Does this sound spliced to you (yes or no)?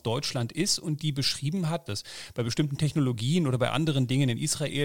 yes